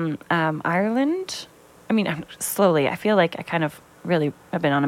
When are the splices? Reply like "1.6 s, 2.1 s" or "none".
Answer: 1.8 s